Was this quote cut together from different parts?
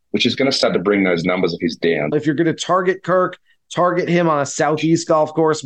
yes; 1 cut; at 2.1 s

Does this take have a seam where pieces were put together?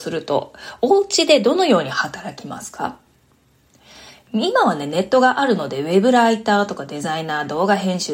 no; 0 cuts

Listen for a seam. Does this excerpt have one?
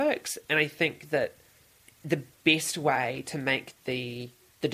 no; 0 cuts

